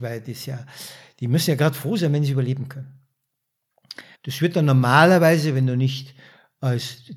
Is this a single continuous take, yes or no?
no